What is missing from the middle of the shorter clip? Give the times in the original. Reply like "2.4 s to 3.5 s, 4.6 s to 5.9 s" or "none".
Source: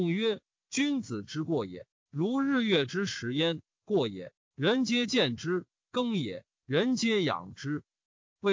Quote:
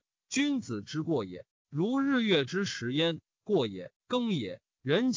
4.4 s to 5.8 s